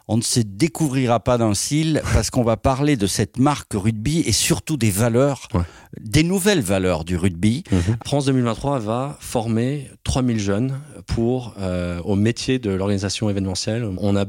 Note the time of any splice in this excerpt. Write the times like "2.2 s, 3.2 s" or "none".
8.0 s